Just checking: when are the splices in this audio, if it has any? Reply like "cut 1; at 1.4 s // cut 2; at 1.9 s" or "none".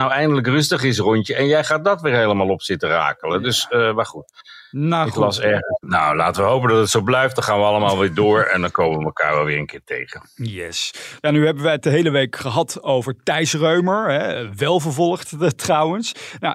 cut 1; at 5.8 s